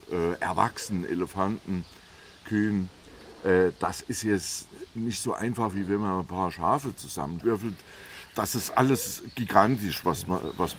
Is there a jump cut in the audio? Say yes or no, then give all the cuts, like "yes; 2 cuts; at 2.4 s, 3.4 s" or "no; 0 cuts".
no; 0 cuts